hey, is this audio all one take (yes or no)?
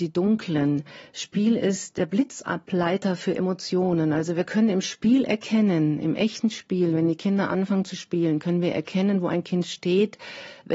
yes